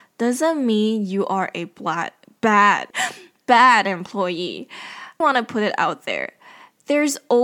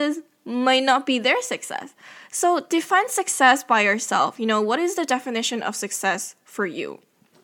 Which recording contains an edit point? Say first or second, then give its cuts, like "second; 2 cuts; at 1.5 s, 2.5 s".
first; 2 cuts; at 2.9 s, 5.2 s